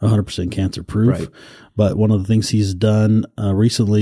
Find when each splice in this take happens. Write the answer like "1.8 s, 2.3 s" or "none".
none